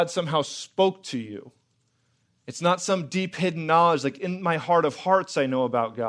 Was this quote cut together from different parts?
no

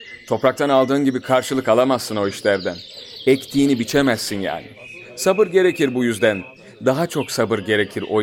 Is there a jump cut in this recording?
no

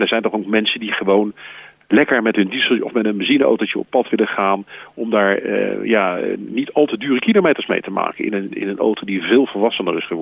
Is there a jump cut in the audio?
yes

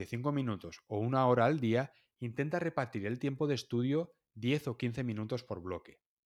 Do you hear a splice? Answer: no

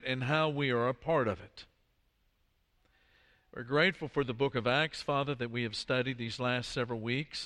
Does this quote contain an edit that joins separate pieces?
no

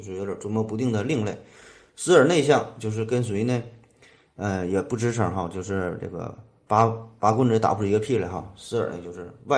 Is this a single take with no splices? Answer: yes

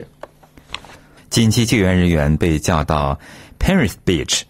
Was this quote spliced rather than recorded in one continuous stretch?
yes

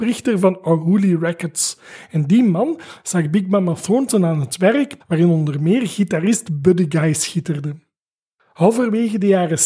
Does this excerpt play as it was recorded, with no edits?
no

